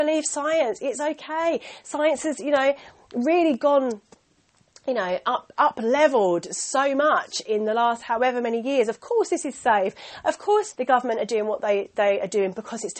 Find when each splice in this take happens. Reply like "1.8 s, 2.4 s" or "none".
10.7 s

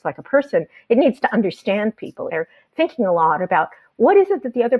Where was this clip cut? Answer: 2.3 s

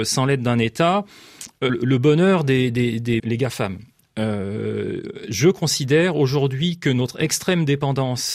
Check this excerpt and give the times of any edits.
1.7 s, 3.2 s

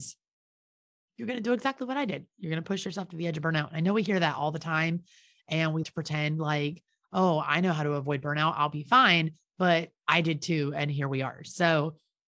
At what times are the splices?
5.8 s

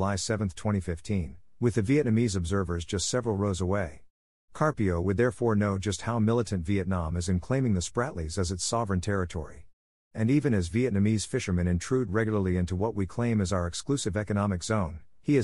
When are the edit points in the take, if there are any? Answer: none

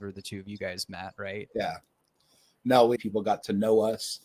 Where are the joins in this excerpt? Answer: 1.5 s, 3.0 s

